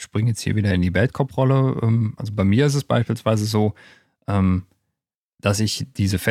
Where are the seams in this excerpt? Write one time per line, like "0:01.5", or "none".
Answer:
none